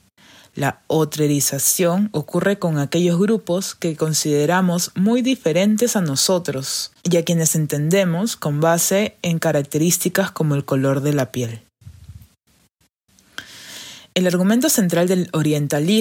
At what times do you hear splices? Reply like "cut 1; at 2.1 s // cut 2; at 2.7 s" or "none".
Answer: cut 1; at 7.0 s